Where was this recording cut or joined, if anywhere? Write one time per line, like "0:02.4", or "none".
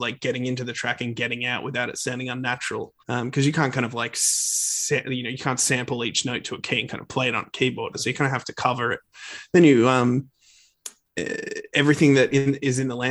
0:03.0
0:07.9